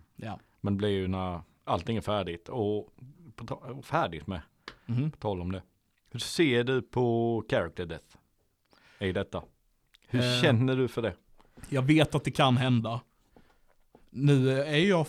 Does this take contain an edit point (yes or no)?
no